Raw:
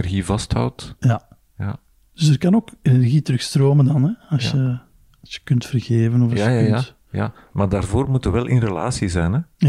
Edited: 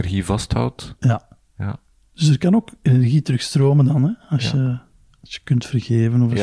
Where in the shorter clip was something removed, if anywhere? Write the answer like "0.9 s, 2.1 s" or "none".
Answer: none

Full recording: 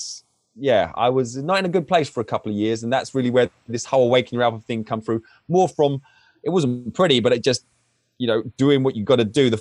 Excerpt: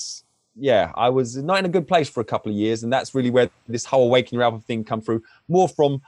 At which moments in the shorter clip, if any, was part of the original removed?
none

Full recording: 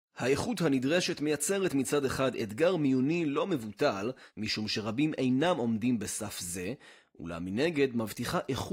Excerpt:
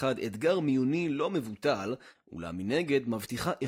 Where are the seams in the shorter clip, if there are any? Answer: 2.1 s

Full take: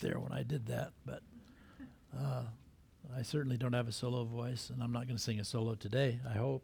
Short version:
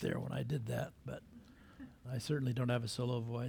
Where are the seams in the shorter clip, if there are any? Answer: 2.0 s

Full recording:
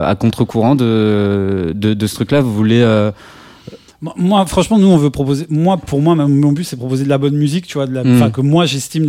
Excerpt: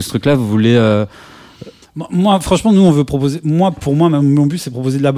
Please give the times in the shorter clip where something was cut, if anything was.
none

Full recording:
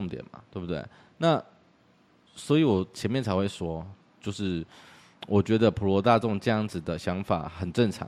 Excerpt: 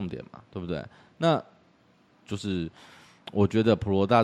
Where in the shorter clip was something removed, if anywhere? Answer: 2.1 s

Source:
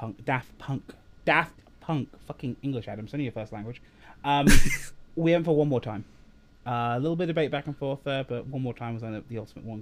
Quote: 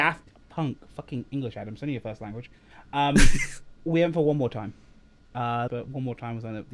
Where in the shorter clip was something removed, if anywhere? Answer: 5.7 s

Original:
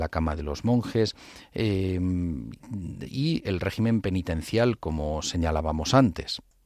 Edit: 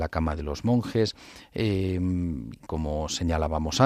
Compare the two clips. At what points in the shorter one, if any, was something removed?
2.7 s

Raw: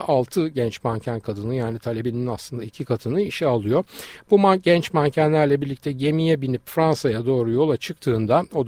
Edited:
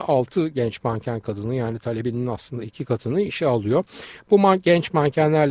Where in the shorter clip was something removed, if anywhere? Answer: none

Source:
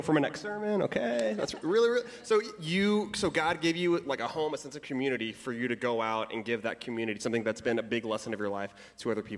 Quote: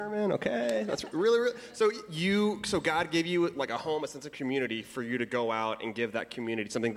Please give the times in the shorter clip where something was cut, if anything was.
none

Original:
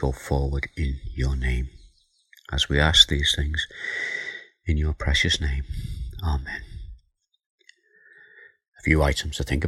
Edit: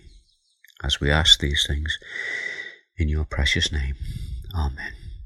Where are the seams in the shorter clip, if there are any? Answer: none

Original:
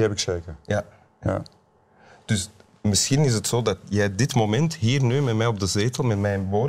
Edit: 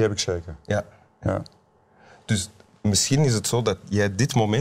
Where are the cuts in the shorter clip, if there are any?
none

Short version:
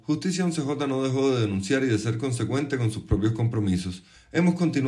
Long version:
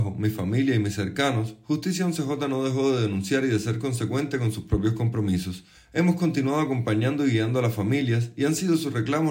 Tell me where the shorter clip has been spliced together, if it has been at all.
none

